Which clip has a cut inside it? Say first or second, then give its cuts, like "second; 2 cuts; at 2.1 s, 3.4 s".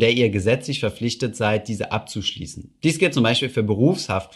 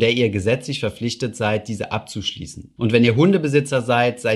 second; 1 cut; at 2.8 s